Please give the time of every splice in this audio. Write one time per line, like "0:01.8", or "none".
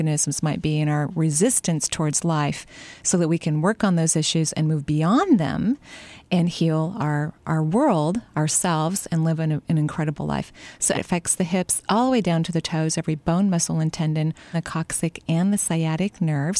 0:10.9
0:14.5